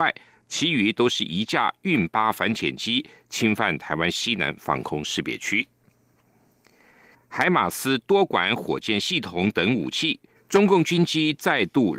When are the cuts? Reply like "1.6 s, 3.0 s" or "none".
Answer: 7.1 s, 10.4 s